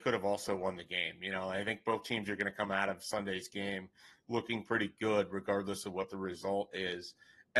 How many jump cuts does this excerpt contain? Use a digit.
0